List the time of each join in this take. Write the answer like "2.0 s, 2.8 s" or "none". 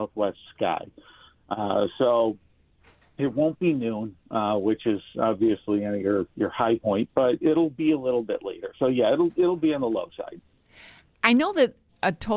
none